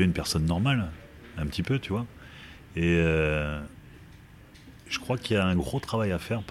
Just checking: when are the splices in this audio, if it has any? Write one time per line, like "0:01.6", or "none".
none